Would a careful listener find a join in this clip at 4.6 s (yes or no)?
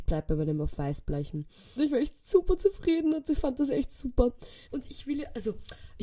yes